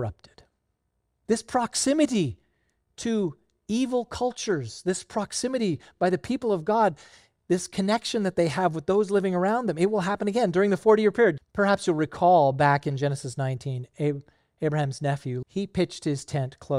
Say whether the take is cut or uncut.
cut